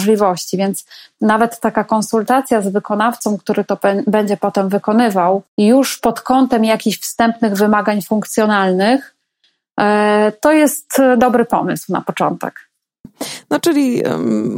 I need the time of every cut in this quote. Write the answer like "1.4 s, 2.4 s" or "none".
5.5 s, 13.0 s